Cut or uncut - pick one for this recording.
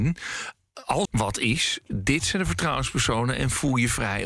cut